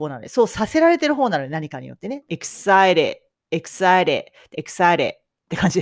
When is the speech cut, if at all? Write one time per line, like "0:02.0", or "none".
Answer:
0:02.3
0:04.5